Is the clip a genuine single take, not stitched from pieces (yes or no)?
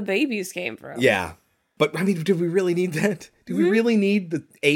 yes